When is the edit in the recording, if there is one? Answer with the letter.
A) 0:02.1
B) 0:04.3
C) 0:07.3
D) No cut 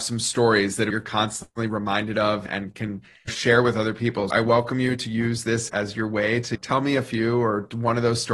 B